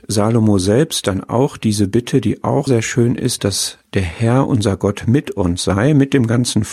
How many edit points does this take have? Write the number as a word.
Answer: one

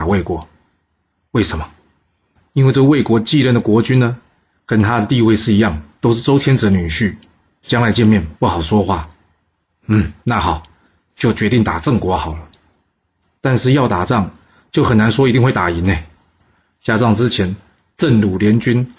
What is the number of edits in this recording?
zero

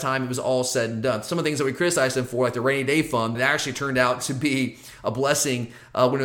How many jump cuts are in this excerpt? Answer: one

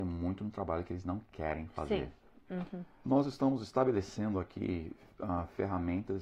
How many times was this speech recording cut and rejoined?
one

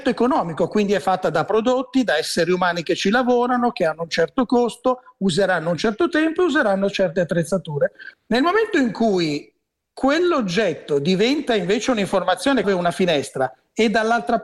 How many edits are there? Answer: two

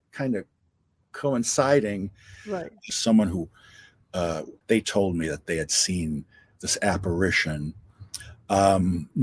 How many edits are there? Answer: two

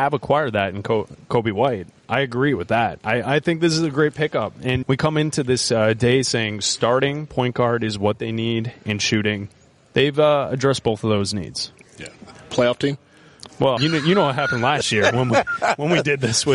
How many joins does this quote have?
two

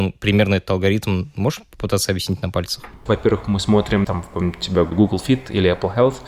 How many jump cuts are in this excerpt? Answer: one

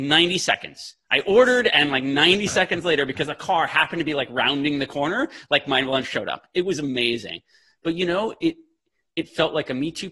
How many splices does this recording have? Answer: zero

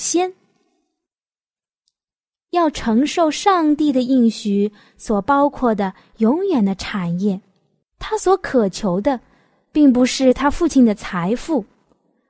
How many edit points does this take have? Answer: one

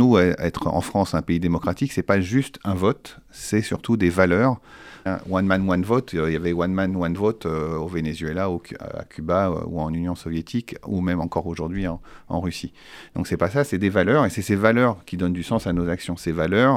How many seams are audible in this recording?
one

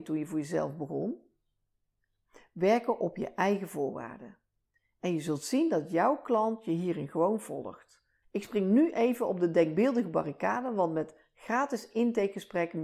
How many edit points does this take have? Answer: one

